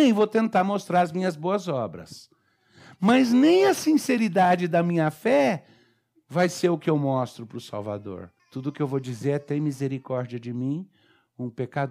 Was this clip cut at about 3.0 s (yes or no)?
no